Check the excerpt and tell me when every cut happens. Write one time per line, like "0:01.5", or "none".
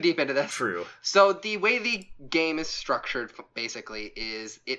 none